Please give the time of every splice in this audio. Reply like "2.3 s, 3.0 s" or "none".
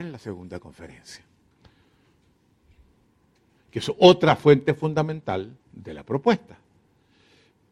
5.6 s